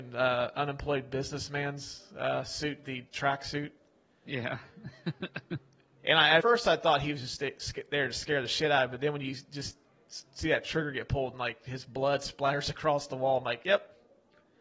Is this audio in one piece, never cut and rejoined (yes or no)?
no